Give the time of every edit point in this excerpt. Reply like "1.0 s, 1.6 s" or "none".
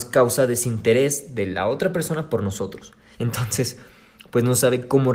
3.1 s